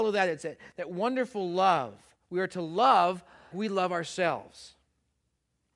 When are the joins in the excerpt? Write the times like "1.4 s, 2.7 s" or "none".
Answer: 3.5 s